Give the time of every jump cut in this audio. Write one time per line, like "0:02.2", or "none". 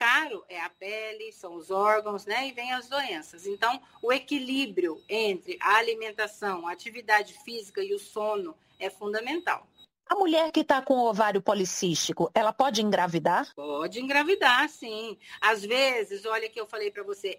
0:13.5